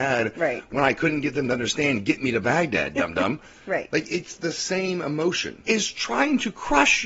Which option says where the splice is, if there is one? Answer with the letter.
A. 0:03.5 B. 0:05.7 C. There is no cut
B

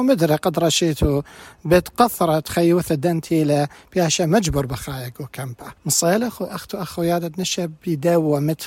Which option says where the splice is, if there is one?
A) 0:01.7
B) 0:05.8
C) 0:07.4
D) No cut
B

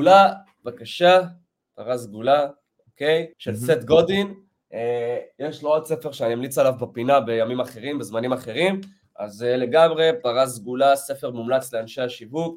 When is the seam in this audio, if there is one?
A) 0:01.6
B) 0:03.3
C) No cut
B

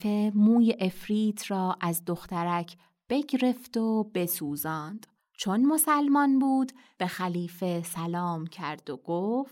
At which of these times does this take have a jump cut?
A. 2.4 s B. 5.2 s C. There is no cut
B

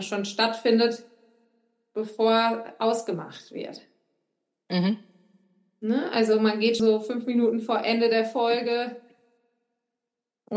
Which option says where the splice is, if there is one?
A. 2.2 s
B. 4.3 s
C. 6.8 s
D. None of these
C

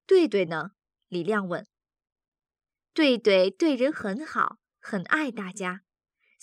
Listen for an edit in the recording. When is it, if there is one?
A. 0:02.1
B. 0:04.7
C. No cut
C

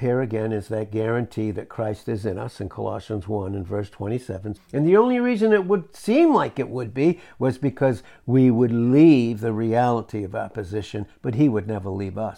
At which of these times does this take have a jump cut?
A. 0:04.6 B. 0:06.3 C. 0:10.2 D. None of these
A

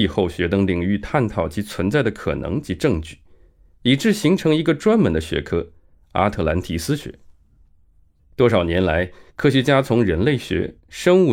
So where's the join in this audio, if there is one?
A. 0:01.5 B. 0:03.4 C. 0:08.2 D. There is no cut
C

